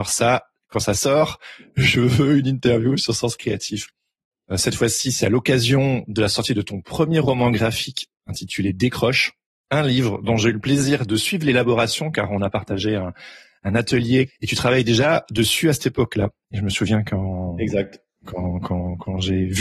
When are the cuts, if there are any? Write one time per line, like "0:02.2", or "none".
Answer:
0:04.5
0:14.3